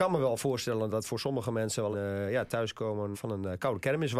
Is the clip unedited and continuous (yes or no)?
no